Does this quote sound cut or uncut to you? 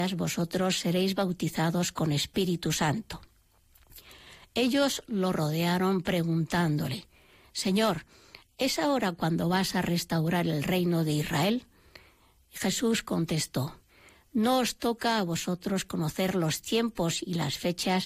uncut